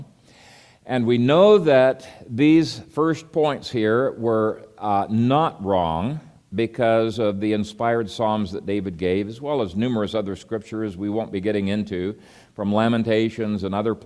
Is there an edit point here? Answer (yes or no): no